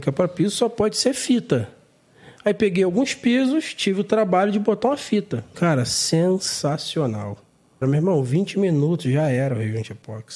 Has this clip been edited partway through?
yes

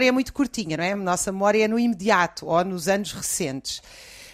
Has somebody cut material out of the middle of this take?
no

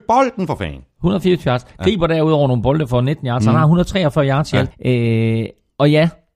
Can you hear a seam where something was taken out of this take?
yes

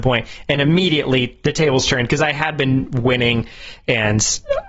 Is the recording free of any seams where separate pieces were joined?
yes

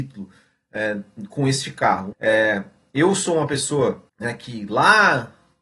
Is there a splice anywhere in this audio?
yes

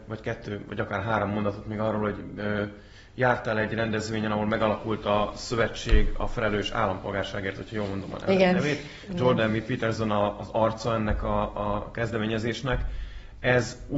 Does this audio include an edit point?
no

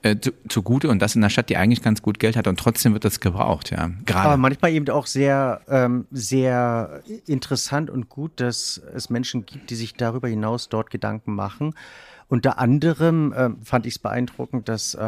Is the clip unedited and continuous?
no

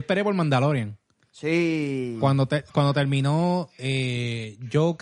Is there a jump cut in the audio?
no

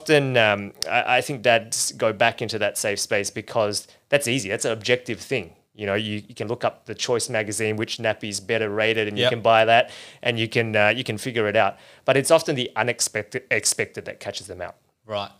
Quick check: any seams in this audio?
no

